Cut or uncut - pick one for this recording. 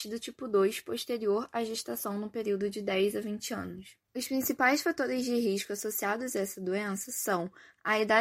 cut